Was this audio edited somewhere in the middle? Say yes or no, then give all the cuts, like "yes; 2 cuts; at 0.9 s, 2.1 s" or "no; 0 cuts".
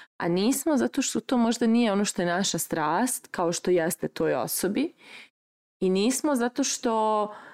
no; 0 cuts